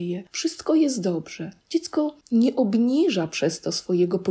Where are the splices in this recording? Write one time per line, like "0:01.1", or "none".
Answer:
none